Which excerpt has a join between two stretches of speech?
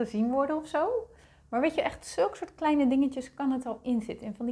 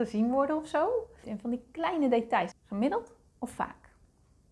second; 2 cuts; at 1.2 s, 2.5 s

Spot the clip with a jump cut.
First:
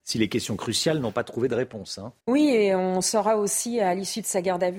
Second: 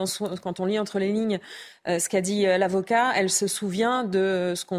first; 1 cut; at 2.2 s

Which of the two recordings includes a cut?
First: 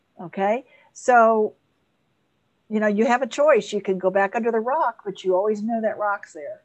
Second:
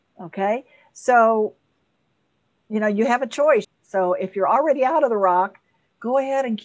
second; 1 cut; at 3.6 s

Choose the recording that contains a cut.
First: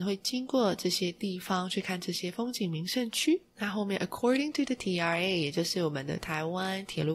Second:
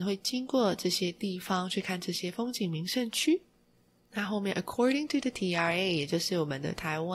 first; 1 cut; at 3.5 s

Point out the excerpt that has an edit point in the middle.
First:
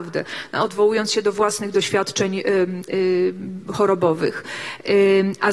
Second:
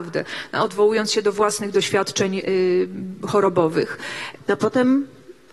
second; 2 cuts; at 2.4 s, 4.4 s

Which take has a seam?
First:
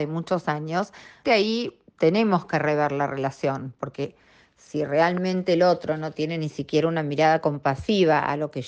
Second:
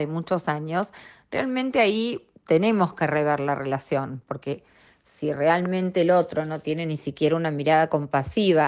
first; 1 cut; at 1.2 s

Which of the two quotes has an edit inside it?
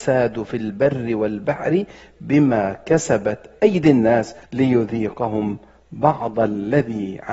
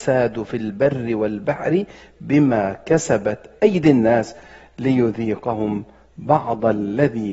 first; 1 cut; at 4.4 s

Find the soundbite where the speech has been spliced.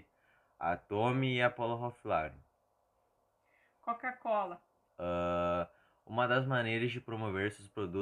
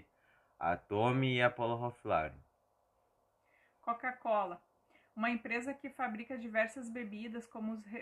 first; 1 cut; at 4.9 s

